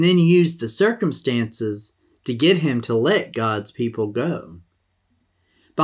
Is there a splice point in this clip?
no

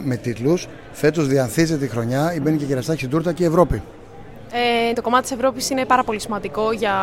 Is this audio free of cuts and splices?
no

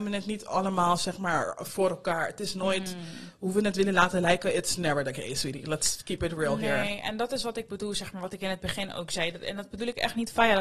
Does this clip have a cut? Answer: no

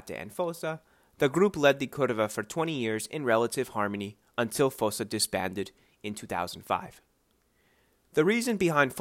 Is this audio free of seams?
yes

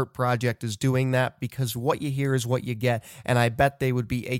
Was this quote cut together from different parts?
no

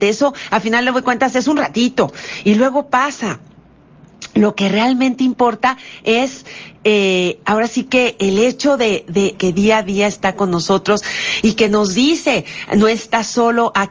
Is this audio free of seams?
no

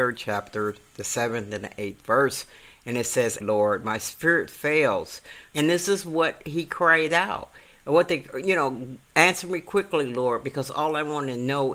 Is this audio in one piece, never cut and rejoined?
no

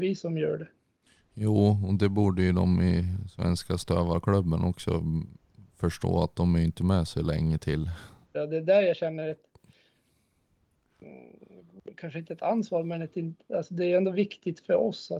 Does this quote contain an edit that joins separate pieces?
yes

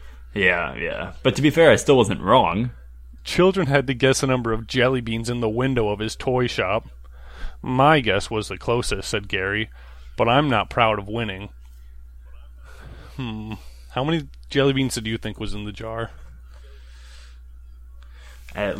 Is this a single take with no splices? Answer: no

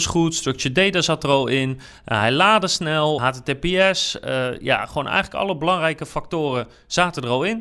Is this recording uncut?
no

